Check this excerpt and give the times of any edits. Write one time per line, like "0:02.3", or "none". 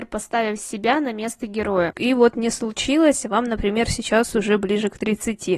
0:01.9